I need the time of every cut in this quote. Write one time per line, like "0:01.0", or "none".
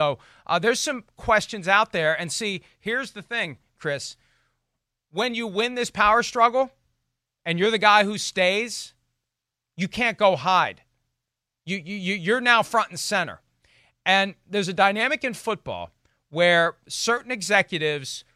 none